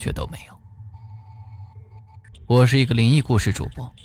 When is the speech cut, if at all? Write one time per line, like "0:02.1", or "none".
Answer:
0:02.3